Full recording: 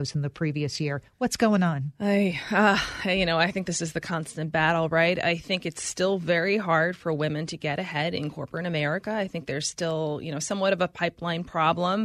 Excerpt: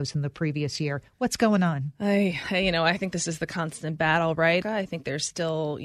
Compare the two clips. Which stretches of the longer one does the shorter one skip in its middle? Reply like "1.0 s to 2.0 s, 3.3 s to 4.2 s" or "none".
2.4 s to 3.0 s, 5.2 s to 9.0 s

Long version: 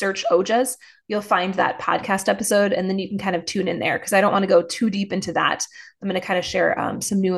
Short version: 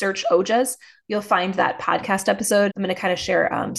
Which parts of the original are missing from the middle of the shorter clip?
2.7 s to 6.0 s

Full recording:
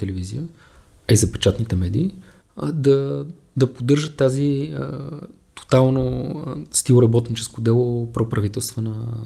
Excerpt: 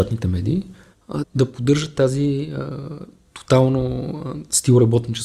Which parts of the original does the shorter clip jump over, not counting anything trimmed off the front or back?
2.7 s to 3.4 s

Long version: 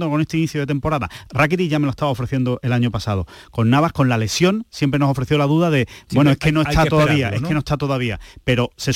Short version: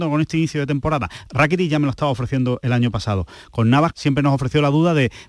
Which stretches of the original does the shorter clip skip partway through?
3.9 s to 4.7 s

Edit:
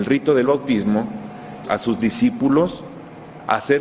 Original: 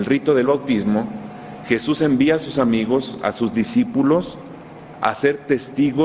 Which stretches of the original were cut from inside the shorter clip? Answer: 1.6 s to 3.2 s

